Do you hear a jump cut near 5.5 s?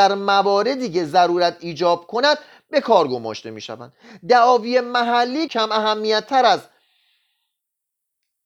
yes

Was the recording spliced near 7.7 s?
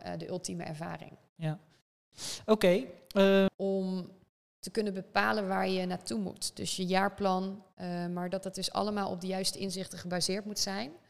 no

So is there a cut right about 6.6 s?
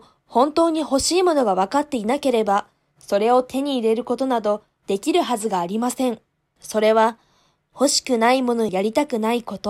yes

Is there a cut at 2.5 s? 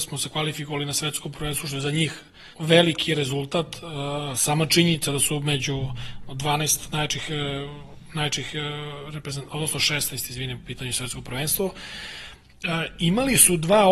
yes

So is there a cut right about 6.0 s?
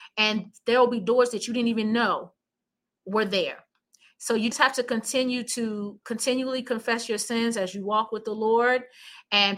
yes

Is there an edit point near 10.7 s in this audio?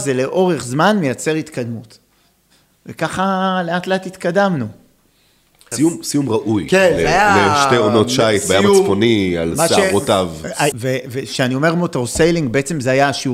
yes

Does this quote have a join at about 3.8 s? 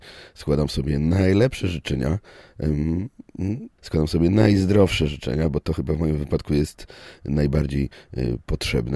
yes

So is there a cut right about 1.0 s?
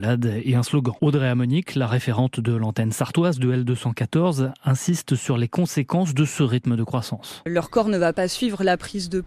yes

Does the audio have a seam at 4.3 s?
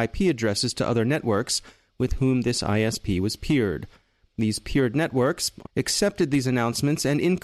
no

